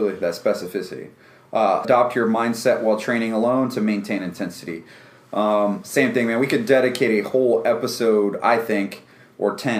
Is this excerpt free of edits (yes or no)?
no